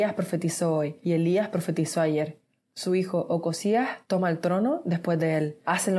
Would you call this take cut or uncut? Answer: uncut